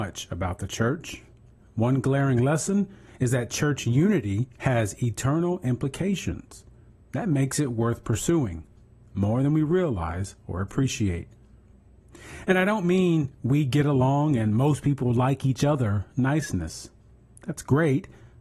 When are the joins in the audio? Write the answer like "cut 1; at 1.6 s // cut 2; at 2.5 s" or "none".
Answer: none